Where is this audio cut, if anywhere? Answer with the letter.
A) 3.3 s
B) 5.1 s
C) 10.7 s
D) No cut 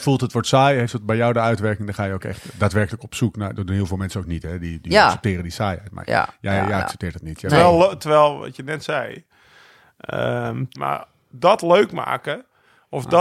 C